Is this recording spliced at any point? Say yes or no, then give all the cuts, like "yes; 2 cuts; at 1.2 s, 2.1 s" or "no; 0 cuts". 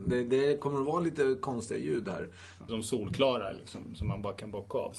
yes; 1 cut; at 2.7 s